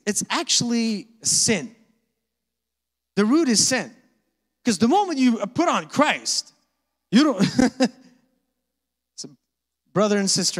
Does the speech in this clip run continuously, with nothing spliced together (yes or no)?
yes